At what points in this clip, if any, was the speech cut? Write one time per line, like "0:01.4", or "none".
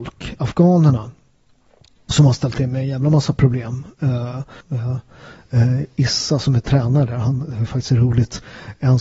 0:04.6